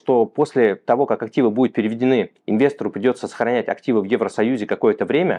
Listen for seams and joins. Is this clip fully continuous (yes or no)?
yes